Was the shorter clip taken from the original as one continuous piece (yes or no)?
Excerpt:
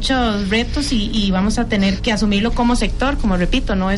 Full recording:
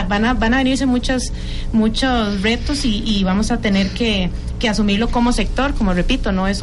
no